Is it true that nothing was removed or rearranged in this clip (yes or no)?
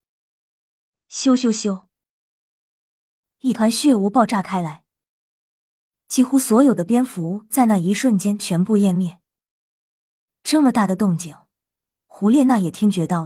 no